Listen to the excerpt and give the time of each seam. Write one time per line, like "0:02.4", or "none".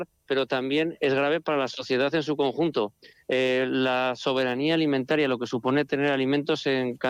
none